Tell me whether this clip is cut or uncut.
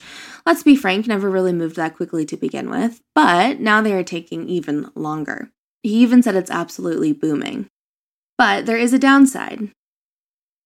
cut